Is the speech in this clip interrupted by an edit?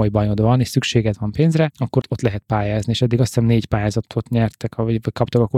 yes; 1 cut; at 2.0 s

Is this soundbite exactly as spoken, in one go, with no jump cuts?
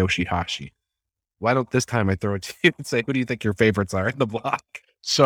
yes; 0 cuts

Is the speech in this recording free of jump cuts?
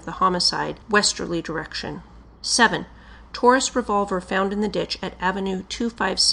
yes; 0 cuts

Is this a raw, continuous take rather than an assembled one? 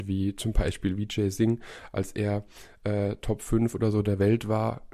yes; 0 cuts

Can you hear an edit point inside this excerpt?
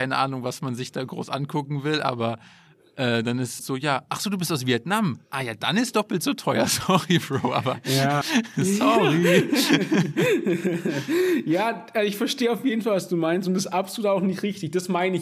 yes; 2 cuts; at 3.6 s, 8.2 s

